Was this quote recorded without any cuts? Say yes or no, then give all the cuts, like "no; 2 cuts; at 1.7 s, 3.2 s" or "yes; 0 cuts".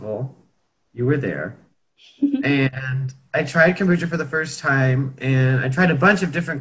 yes; 0 cuts